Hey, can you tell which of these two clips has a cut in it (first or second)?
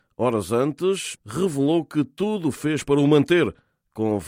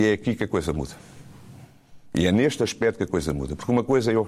first